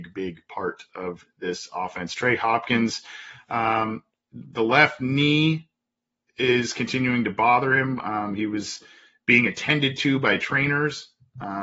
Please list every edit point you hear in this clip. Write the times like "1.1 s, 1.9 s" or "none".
none